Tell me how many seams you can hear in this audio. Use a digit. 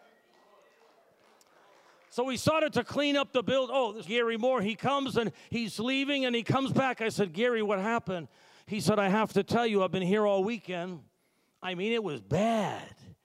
1